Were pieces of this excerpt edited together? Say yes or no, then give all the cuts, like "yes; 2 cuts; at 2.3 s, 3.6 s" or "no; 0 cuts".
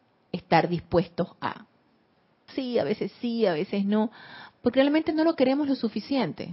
yes; 1 cut; at 2.5 s